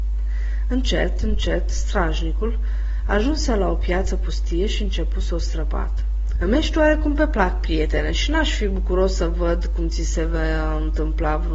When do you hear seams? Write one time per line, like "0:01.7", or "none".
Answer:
0:06.4